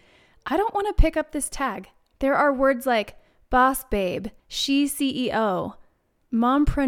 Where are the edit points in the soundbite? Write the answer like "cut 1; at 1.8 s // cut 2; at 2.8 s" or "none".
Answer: cut 1; at 2.1 s // cut 2; at 4.4 s